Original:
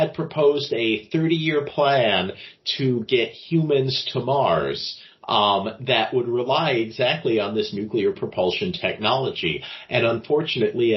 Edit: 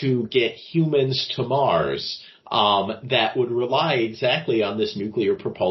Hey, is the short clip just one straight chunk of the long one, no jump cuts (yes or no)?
yes